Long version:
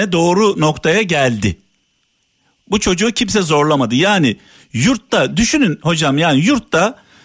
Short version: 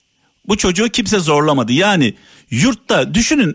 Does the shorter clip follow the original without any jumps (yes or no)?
yes